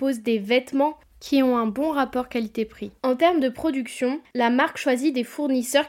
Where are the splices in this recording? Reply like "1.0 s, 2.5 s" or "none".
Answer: 3.0 s